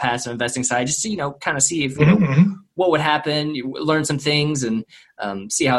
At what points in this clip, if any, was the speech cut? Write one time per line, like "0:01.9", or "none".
none